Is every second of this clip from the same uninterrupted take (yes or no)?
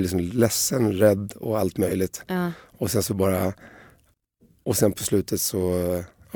yes